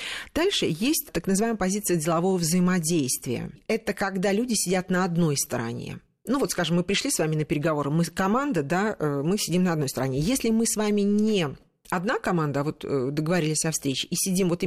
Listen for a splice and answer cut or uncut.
uncut